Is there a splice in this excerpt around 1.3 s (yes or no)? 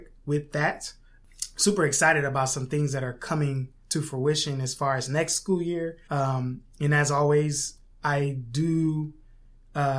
no